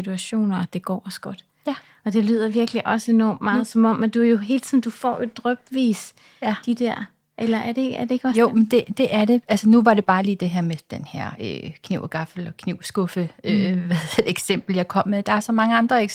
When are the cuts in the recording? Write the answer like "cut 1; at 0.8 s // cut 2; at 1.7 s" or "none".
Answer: none

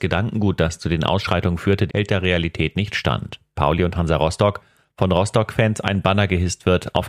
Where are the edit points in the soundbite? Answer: cut 1; at 1.9 s // cut 2; at 3.6 s

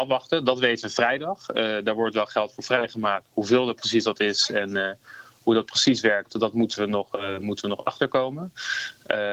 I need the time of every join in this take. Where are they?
none

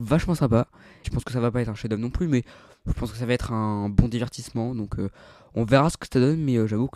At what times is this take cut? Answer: cut 1; at 1.0 s

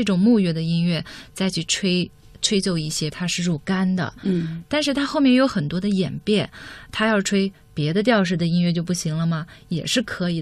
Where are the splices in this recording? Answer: cut 1; at 3.1 s

